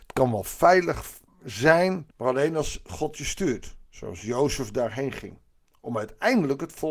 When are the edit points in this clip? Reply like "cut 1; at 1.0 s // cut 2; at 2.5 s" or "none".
cut 1; at 2.1 s // cut 2; at 3.9 s